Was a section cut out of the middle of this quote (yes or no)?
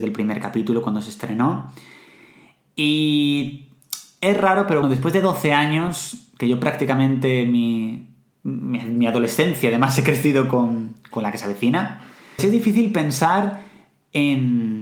yes